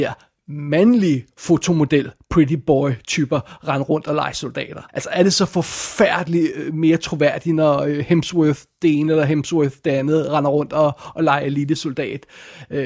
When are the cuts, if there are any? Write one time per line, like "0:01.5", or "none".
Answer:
0:04.9